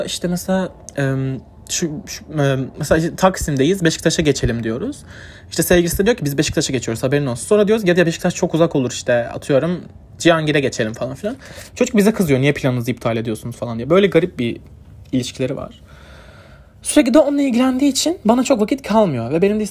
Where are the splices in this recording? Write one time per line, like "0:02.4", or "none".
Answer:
0:10.2